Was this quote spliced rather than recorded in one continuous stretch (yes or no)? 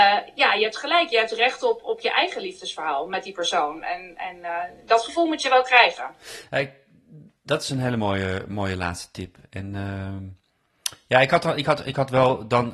no